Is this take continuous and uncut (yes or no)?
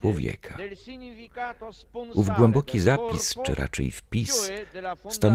yes